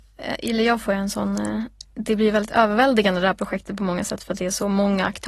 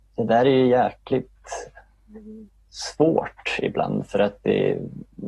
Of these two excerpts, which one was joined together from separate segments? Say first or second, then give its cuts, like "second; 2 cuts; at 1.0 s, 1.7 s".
first; 1 cut; at 1.8 s